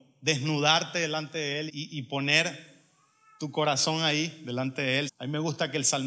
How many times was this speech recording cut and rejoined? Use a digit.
2